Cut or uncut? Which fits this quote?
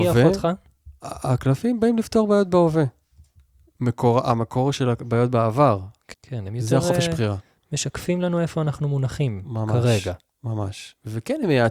cut